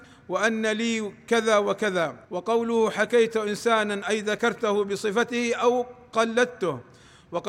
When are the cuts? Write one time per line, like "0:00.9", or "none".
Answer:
0:02.2

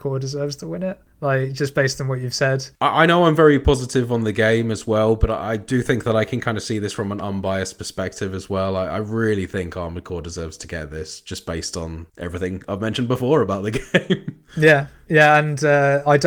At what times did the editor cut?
none

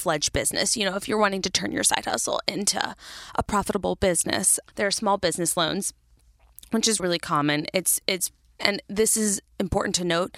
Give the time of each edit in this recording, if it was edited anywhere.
0:07.0
0:08.6

